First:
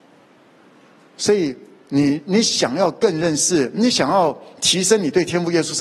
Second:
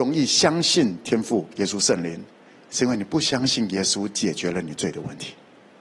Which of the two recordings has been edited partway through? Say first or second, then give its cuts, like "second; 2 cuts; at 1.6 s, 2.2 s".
second; 1 cut; at 2.5 s